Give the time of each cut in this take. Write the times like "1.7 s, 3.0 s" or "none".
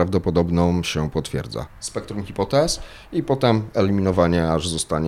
1.7 s